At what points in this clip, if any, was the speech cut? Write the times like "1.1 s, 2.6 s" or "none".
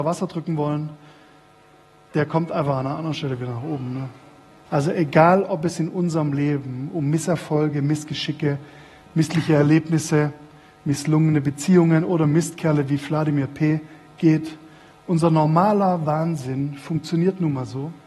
4.7 s